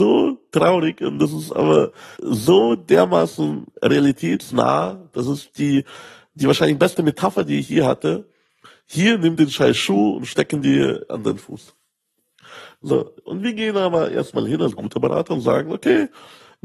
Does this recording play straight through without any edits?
no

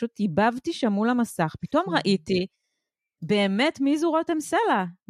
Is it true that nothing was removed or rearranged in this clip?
yes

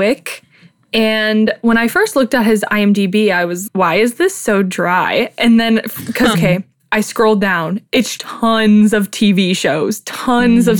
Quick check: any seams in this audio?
yes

